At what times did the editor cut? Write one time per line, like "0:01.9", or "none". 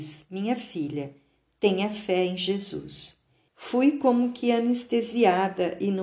0:03.5